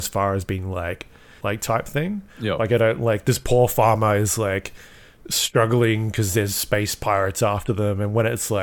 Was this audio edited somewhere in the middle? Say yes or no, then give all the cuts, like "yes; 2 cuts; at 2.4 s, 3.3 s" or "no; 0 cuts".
yes; 1 cut; at 1.4 s